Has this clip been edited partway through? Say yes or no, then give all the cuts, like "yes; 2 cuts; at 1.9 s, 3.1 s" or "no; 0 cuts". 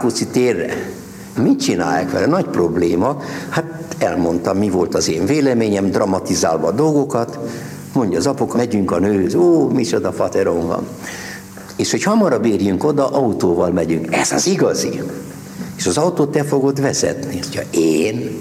yes; 2 cuts; at 1.4 s, 8.5 s